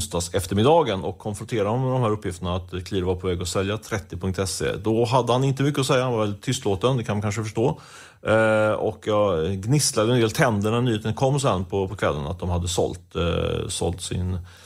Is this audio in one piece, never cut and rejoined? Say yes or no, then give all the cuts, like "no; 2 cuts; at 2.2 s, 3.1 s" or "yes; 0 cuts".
yes; 0 cuts